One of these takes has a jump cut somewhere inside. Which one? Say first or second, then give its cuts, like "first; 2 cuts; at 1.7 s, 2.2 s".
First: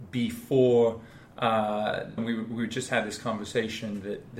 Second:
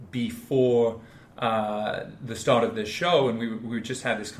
first; 1 cut; at 2.2 s